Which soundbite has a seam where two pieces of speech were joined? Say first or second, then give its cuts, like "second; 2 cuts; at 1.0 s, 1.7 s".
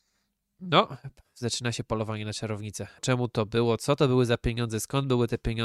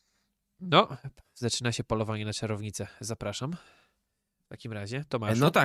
first; 1 cut; at 3.0 s